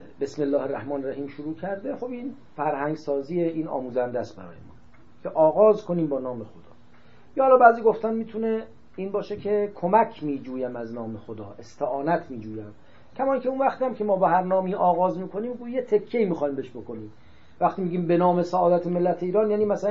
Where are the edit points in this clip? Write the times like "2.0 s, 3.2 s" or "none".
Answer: none